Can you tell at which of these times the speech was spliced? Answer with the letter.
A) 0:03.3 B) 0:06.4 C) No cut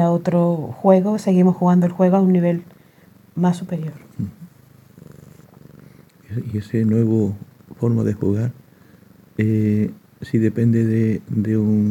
C